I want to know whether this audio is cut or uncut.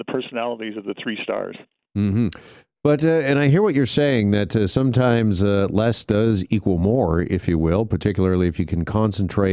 uncut